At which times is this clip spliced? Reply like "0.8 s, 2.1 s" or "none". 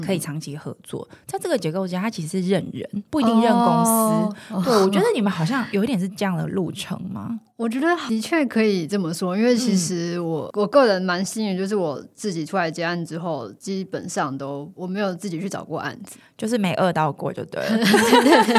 none